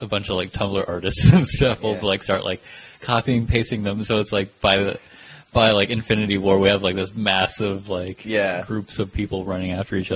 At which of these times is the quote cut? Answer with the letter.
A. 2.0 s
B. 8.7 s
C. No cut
C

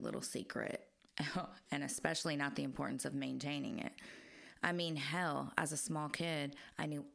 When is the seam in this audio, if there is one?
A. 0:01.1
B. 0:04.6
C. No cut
A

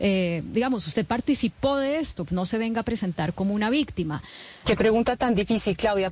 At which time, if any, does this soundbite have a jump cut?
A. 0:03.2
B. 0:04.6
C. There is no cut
B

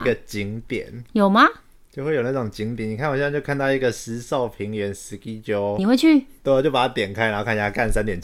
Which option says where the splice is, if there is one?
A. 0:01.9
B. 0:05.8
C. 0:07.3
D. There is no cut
B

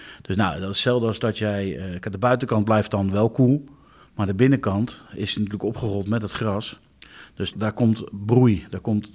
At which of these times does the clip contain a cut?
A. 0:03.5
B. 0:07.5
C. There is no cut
B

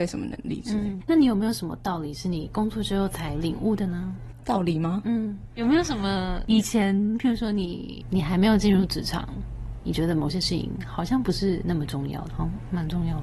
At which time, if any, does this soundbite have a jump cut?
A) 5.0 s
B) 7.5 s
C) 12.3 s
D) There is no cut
C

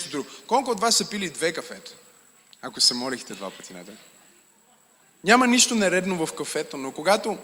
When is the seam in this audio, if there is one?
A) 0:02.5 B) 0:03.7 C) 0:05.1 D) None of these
A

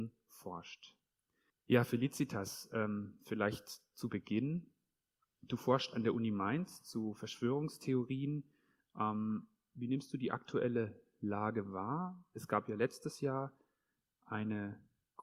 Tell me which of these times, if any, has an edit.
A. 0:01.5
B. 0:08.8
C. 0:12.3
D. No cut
A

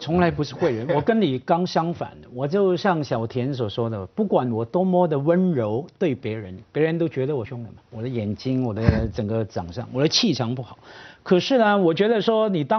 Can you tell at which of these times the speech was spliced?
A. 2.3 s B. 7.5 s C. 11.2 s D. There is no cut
B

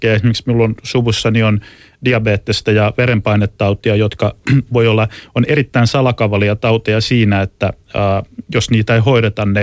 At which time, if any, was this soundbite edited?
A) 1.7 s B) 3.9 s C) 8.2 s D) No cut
D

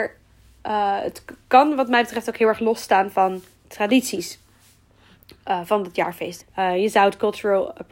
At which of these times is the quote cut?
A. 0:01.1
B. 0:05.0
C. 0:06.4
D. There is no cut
C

